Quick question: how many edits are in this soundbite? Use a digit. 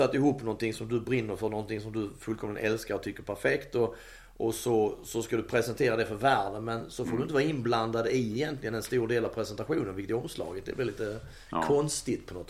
0